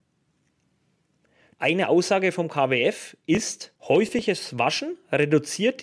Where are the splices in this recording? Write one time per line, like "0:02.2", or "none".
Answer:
0:01.5
0:03.8